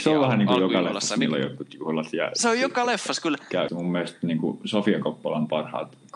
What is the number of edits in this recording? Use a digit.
1